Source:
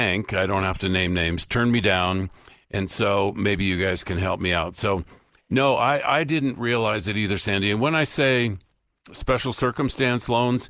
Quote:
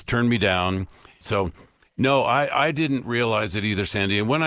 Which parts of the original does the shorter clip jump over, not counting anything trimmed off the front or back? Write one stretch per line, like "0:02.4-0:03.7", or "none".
0:02.6-0:04.7